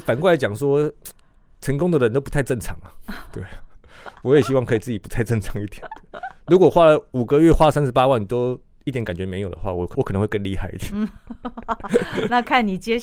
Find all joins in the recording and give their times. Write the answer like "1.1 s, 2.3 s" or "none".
9.9 s

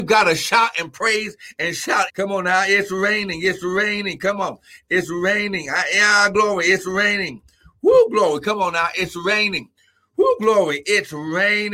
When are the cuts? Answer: 2.1 s

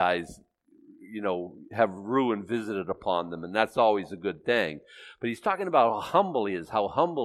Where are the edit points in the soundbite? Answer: none

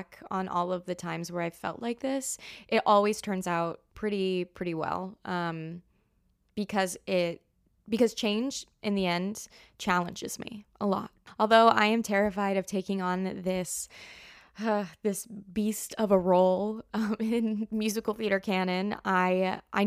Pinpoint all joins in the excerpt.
3.9 s

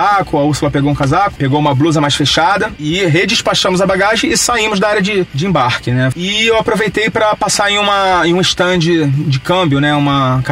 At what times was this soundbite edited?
6.1 s

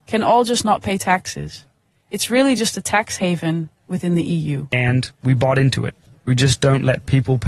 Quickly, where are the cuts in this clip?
6.1 s

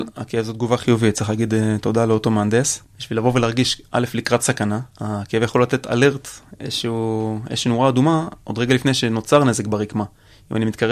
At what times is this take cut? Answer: 2.9 s

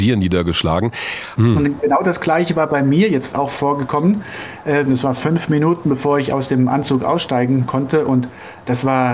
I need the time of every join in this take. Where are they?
1.4 s

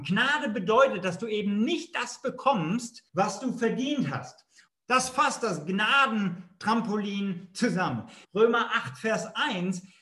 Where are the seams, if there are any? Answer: 3.1 s, 4.7 s, 8.2 s

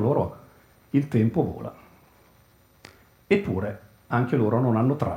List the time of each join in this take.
none

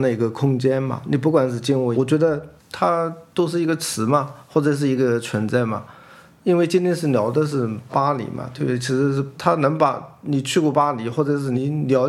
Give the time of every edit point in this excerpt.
1.9 s

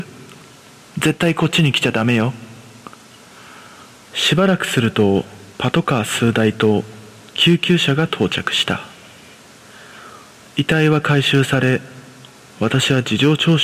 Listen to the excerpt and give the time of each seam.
4.0 s, 5.5 s

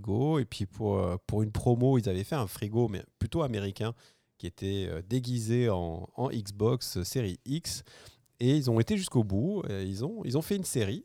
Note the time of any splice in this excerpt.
none

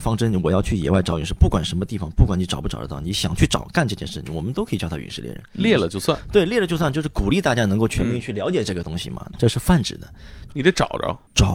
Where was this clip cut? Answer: 9.3 s, 10.5 s

